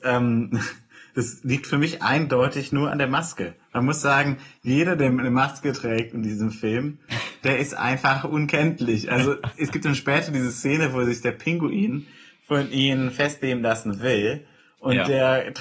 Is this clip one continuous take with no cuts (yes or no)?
yes